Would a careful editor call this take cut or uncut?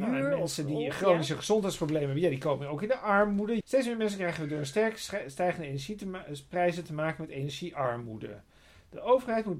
cut